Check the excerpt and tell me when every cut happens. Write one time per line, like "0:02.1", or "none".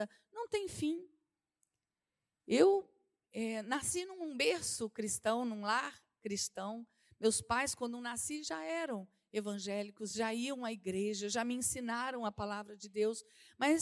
none